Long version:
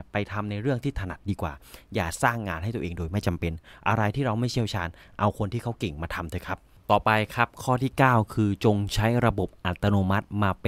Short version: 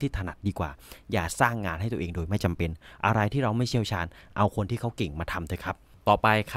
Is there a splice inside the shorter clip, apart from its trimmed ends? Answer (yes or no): no